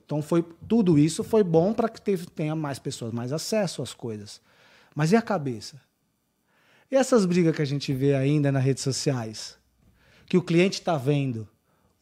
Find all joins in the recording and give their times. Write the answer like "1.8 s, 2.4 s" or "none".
none